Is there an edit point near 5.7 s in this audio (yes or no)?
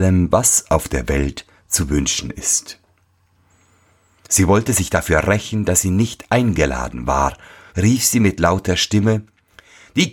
no